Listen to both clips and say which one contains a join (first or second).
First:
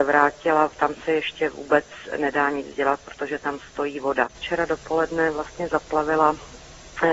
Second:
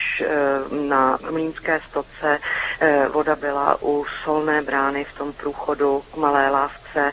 first